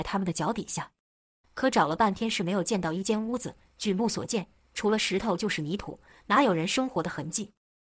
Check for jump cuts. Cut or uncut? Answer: cut